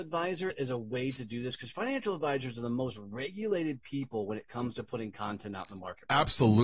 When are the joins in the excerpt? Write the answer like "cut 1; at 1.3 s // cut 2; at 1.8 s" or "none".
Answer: none